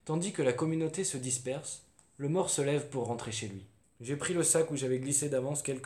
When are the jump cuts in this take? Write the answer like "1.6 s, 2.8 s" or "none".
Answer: 3.8 s